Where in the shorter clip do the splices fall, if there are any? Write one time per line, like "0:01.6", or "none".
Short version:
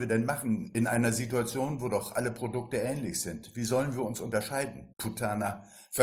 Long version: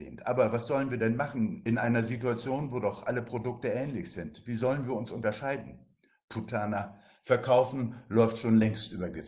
0:04.9